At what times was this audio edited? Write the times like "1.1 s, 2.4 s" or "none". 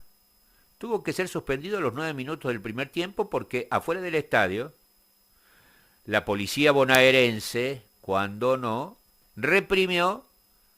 none